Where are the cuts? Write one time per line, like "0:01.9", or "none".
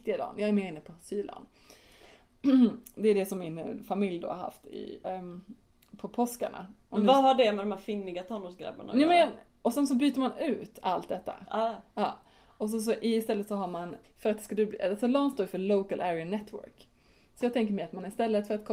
0:05.0
0:14.0